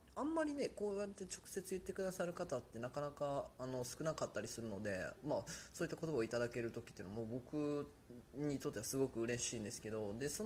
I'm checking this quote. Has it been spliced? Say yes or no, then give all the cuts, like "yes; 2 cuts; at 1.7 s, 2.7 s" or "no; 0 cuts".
no; 0 cuts